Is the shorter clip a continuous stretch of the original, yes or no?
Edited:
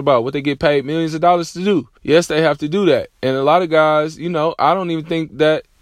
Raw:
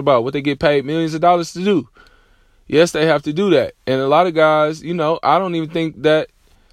no